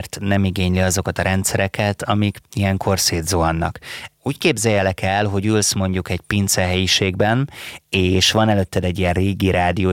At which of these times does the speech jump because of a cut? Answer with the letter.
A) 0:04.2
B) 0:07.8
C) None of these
A